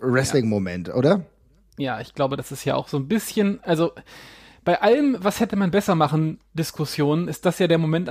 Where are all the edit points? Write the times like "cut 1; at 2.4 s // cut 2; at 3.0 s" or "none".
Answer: none